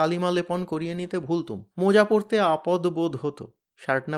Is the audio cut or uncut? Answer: cut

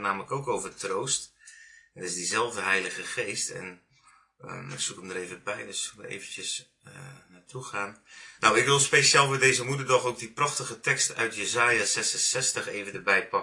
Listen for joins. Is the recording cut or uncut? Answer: cut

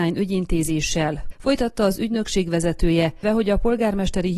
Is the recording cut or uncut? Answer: cut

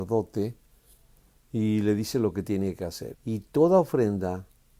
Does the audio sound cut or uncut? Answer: cut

